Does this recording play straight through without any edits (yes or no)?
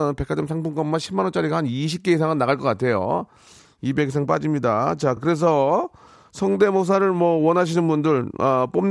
yes